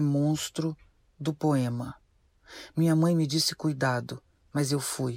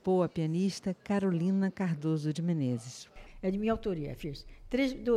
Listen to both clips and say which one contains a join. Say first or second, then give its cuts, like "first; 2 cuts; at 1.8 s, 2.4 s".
second; 1 cut; at 3.3 s